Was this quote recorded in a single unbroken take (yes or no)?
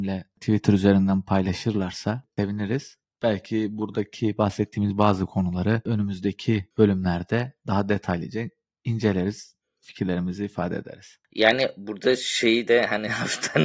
yes